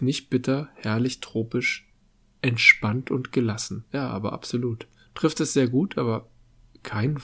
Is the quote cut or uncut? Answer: cut